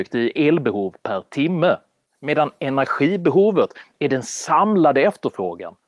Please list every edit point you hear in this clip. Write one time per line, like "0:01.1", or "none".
none